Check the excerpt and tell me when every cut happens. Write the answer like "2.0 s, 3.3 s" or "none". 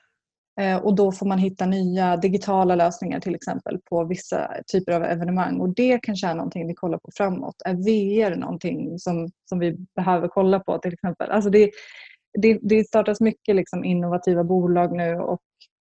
none